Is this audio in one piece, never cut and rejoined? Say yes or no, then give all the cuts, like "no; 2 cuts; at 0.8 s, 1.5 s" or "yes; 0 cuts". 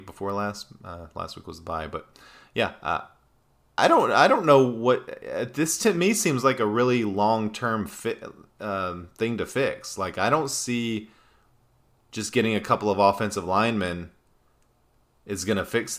no; 1 cut; at 3.8 s